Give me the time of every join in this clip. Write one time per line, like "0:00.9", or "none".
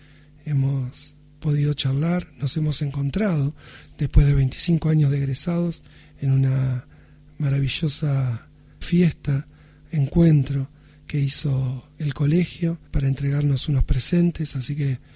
0:08.8
0:12.9